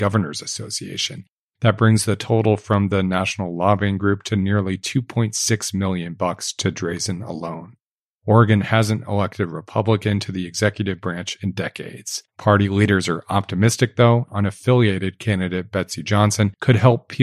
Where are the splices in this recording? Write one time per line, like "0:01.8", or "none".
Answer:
0:14.3

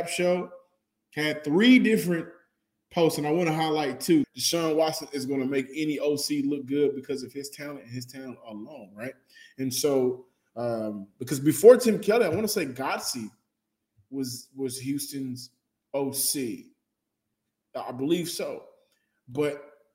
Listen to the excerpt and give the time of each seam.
0:04.2

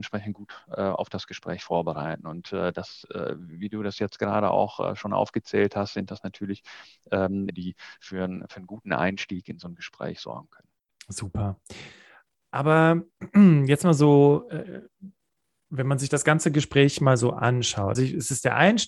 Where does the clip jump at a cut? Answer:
0:07.5
0:18.0

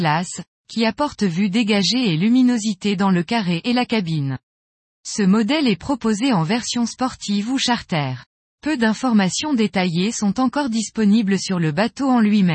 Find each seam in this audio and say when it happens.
none

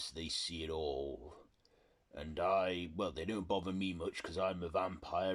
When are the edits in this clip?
none

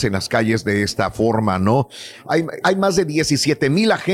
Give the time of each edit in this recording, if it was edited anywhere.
0:02.6

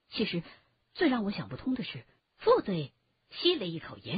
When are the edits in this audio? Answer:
0:02.2

